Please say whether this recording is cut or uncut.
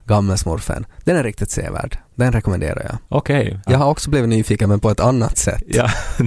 cut